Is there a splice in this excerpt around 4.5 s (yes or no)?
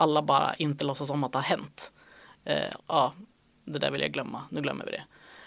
no